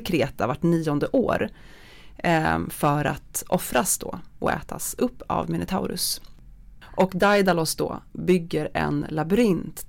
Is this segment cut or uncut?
cut